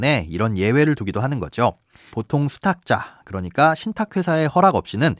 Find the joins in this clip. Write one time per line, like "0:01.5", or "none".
0:02.1